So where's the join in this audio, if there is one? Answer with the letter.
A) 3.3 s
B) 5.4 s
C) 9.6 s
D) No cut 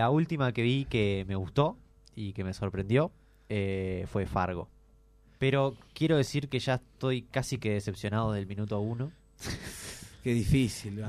B